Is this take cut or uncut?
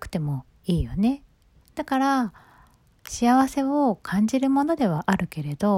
cut